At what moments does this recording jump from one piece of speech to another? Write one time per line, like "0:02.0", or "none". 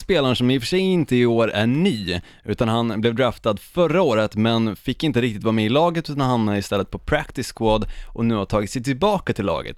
none